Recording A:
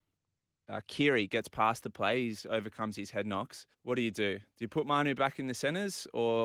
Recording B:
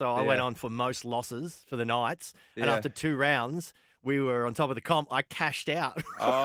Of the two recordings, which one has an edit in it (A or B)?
A